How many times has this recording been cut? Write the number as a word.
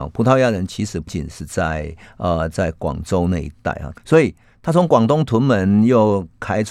two